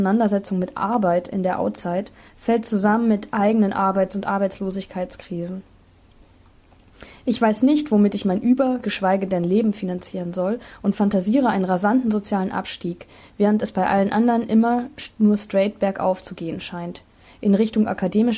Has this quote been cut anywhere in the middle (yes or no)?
no